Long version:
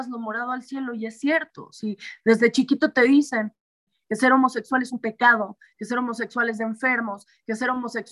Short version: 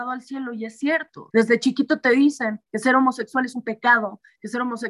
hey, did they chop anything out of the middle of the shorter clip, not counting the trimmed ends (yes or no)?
yes